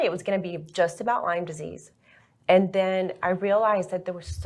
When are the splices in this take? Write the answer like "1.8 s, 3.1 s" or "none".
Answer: none